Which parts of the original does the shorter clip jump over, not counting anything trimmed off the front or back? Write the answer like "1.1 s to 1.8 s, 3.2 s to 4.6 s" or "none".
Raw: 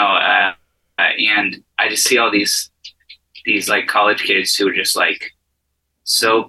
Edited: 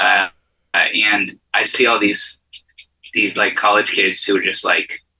1.9 s to 2.0 s